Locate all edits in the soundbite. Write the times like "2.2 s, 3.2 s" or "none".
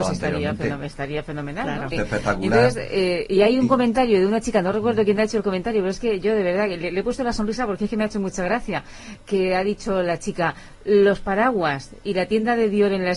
1.9 s